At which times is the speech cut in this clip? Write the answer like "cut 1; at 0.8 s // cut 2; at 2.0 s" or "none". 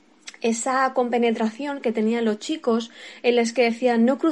none